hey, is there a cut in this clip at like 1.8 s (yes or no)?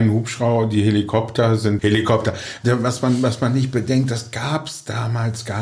yes